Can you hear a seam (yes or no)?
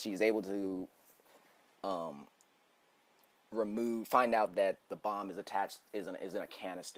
no